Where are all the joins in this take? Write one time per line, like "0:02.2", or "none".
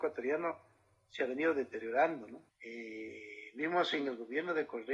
0:02.5